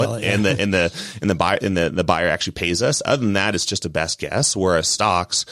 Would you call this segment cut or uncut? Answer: uncut